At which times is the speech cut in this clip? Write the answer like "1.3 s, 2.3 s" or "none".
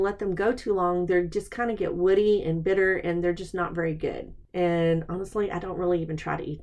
4.4 s